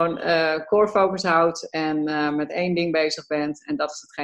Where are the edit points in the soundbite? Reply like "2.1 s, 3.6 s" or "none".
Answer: none